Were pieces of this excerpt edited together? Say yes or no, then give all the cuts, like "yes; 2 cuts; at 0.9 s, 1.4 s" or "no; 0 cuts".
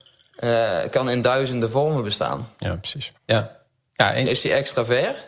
yes; 2 cuts; at 3.2 s, 4.3 s